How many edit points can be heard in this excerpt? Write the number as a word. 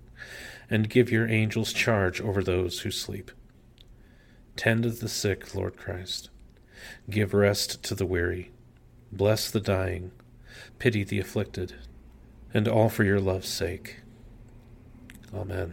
two